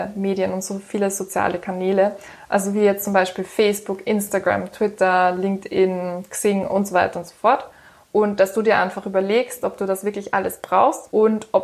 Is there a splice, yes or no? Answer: no